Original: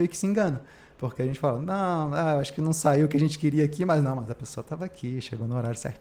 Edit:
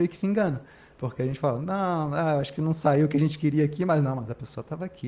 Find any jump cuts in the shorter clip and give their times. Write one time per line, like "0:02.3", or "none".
none